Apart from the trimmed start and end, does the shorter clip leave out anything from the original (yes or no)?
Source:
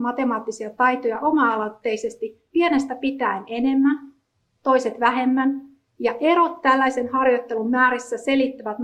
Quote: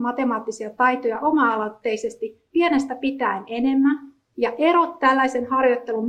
yes